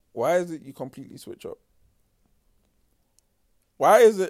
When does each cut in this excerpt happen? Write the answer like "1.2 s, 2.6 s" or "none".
none

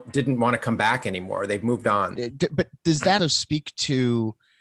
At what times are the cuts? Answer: 2.2 s, 3.2 s

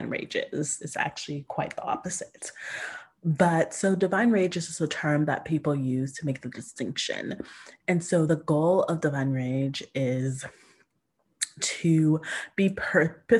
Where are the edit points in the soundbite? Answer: 8.3 s

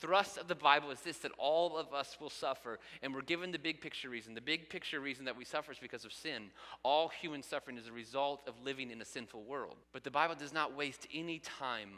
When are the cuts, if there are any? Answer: 9.8 s

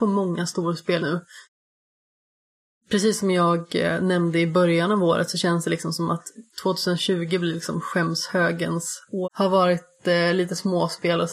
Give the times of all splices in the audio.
1.0 s, 9.2 s

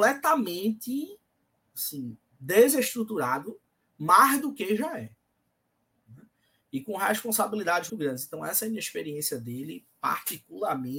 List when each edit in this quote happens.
7.9 s

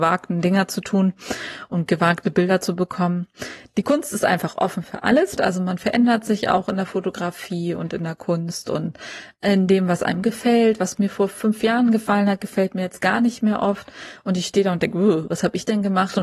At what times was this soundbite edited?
5.4 s

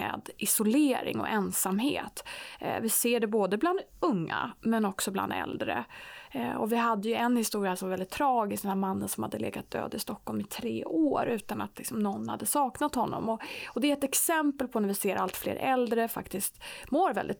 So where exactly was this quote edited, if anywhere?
none

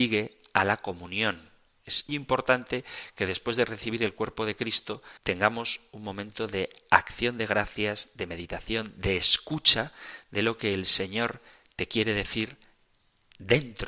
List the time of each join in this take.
2.1 s, 5.2 s

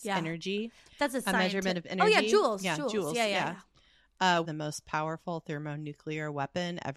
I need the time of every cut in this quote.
4.4 s

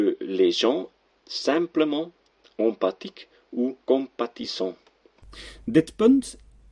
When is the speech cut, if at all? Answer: 3.8 s

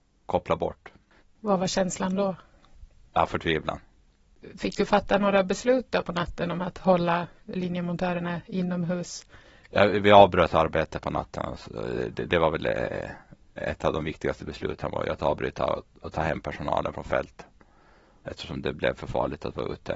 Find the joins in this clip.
1.2 s

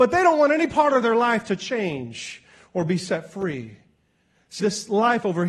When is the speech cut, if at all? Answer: 4.6 s

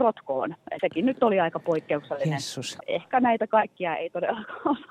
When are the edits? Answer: 2.8 s

